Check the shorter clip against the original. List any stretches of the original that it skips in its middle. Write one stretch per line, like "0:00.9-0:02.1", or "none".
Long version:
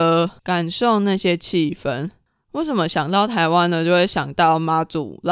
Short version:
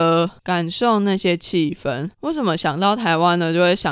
0:02.1-0:02.4